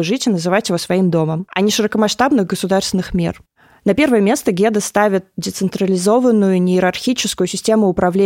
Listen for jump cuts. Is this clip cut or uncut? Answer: uncut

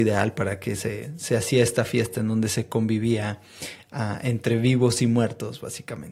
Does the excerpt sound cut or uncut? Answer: uncut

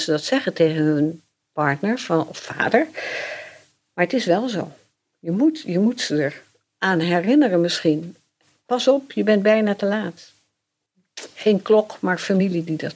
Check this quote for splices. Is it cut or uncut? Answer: uncut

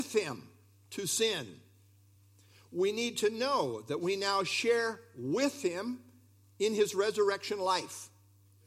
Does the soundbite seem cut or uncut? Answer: uncut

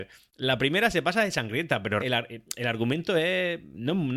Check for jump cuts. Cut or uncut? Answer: cut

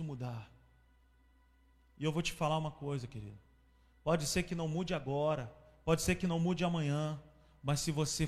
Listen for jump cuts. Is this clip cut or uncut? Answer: uncut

